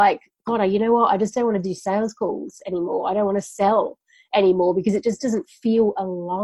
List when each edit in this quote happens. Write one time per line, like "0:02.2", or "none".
none